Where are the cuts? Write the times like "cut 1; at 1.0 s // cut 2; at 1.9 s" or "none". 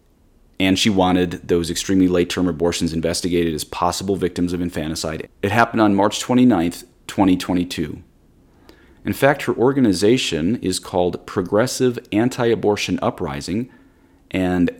cut 1; at 5.2 s // cut 2; at 8.9 s